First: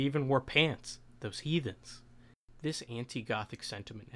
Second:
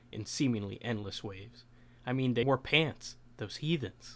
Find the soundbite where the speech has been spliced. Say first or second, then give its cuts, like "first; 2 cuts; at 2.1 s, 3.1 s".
second; 1 cut; at 2.4 s